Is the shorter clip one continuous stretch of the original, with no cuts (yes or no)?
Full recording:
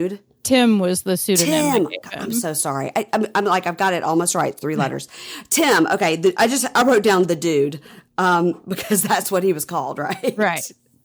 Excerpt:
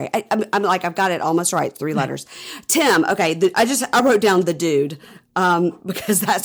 yes